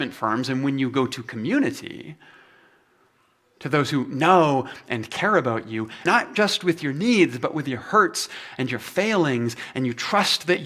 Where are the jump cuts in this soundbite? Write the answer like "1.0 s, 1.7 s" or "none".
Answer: 6.1 s

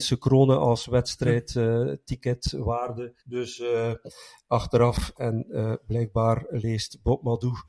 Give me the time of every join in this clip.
3.2 s

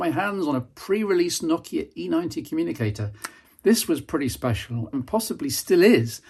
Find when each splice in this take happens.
3.4 s, 4.9 s

